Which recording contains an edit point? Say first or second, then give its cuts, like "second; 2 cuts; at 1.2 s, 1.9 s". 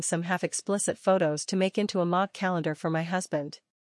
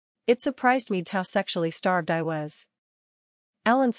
second; 1 cut; at 1.0 s